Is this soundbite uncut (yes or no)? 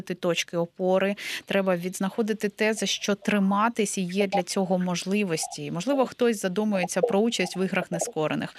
yes